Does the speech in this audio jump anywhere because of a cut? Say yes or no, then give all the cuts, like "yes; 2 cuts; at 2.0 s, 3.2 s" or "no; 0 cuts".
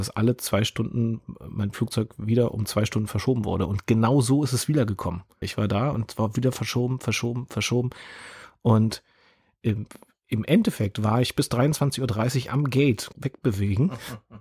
yes; 2 cuts; at 5.4 s, 13.1 s